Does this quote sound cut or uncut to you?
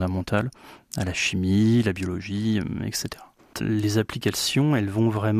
cut